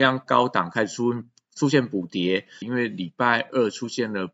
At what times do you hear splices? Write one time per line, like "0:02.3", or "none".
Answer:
0:02.6